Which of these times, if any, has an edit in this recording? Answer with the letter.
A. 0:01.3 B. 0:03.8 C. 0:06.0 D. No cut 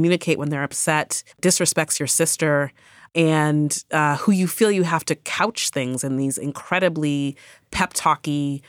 A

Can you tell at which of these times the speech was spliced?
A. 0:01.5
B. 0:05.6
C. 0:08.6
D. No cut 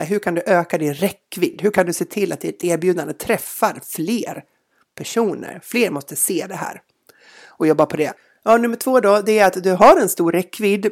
D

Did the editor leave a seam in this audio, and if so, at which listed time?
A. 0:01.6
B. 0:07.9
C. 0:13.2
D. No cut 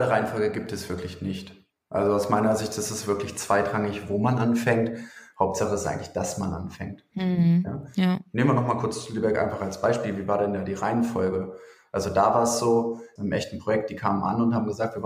C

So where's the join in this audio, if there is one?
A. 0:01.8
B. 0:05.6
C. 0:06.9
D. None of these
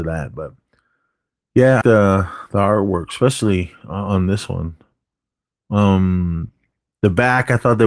A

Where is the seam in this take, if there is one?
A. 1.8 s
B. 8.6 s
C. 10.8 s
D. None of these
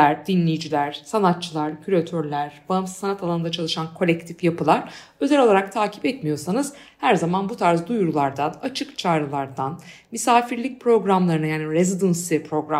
D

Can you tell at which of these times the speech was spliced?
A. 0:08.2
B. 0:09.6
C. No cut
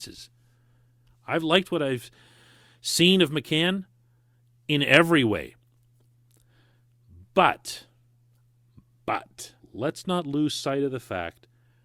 B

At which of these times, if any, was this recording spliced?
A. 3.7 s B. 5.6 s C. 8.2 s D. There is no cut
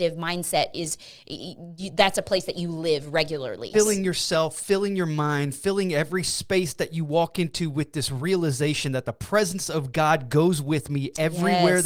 A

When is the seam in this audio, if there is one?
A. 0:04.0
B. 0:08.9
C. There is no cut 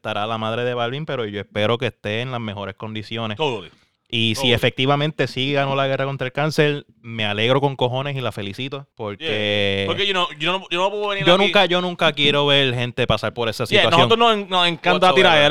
B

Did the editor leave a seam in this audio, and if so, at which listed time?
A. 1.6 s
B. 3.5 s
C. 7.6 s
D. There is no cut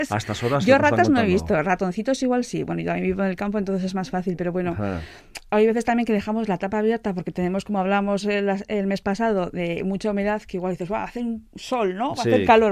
D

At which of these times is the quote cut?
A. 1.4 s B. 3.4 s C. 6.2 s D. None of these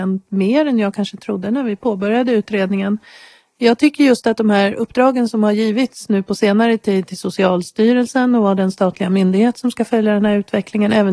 D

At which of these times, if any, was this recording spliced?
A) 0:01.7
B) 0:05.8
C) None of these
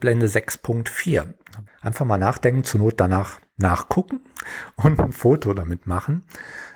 A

